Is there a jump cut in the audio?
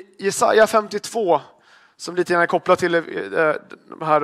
no; 0 cuts

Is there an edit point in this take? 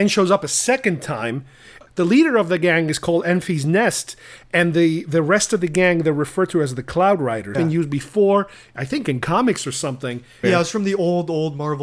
yes; 2 cuts; at 7.5 s, 10.4 s

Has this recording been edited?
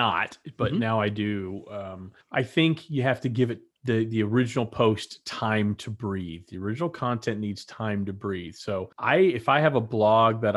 yes; 2 cuts; at 2.2 s, 8.9 s

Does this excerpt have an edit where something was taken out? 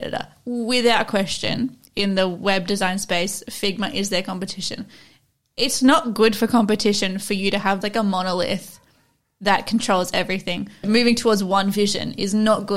yes; 2 cuts; at 7.8 s, 10.8 s

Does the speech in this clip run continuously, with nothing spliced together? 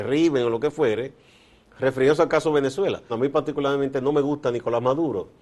no; 1 cut; at 3.1 s

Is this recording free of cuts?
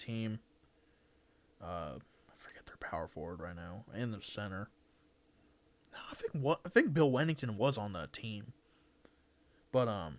yes; 0 cuts

